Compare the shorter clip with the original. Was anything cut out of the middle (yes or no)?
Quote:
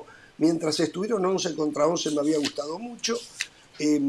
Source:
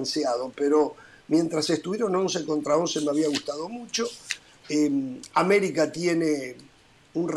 no